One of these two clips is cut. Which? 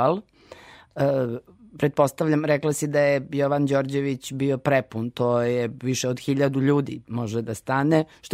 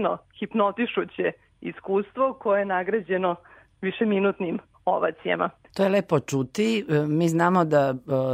second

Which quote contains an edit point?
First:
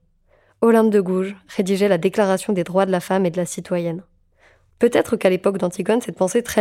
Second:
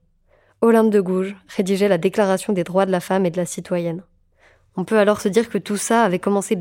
first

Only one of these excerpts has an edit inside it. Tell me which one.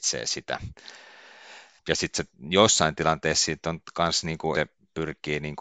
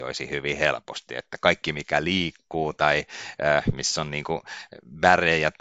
first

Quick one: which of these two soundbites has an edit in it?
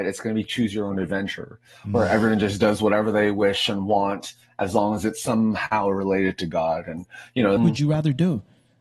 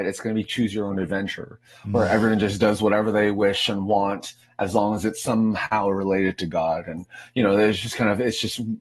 first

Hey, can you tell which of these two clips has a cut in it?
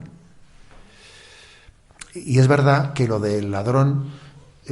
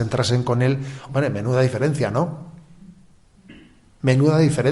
second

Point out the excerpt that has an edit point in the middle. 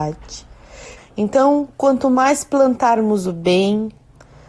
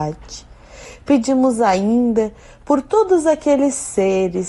first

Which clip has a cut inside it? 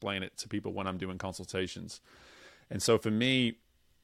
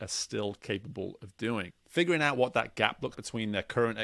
second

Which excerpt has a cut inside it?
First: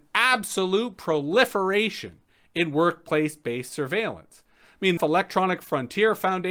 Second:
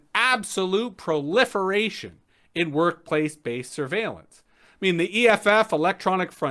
first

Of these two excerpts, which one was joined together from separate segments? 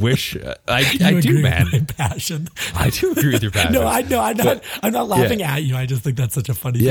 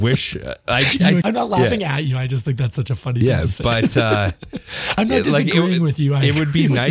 second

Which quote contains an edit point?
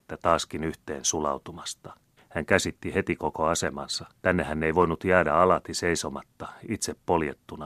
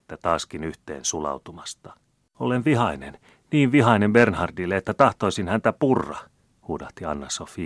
first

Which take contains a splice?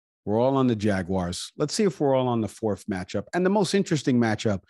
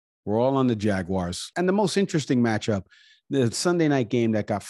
second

